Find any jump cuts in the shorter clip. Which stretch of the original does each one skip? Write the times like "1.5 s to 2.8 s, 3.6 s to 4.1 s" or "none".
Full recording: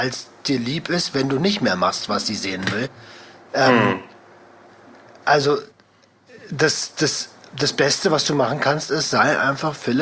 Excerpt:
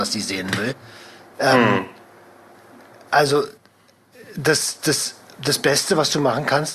none